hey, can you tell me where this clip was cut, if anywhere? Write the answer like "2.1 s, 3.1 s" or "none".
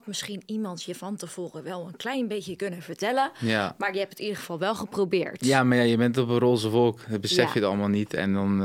none